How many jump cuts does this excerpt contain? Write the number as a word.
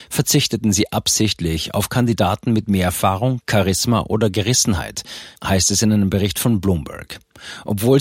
zero